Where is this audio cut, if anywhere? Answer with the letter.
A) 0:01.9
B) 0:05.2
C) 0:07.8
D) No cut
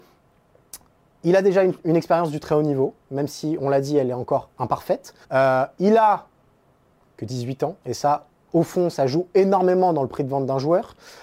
B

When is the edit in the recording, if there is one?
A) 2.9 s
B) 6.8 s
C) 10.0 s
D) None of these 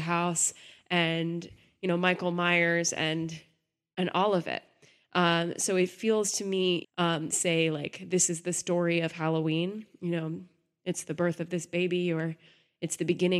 B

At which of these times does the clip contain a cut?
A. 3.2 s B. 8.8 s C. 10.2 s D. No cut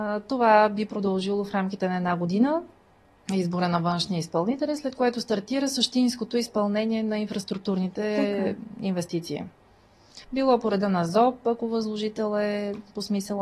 C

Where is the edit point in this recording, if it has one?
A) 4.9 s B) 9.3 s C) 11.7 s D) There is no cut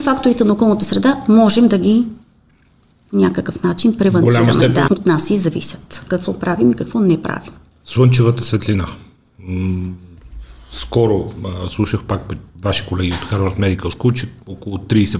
A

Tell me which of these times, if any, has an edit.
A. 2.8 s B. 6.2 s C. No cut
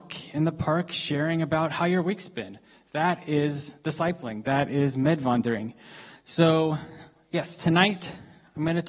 B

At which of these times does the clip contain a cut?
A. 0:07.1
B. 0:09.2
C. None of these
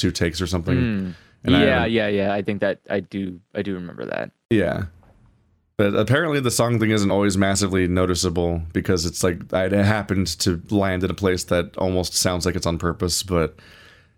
C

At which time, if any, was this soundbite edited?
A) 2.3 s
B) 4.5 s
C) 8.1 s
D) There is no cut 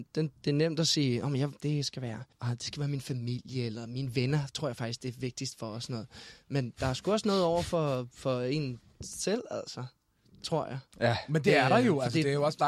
A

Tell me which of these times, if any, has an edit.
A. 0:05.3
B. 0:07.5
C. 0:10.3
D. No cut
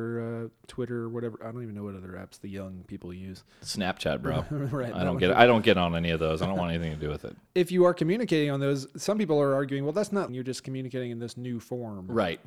C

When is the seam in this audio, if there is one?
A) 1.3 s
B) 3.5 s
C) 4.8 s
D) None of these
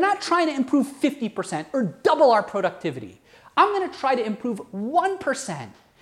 D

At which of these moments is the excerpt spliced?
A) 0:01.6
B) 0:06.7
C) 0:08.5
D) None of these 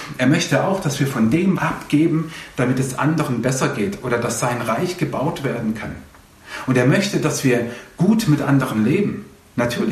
A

